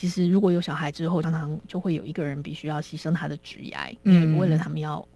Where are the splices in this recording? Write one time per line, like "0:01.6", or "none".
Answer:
0:01.2